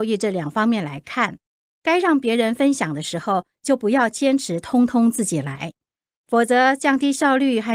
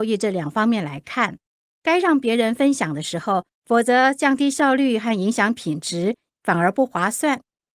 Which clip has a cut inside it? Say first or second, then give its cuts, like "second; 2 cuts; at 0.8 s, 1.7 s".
second; 2 cuts; at 3.5 s, 6.3 s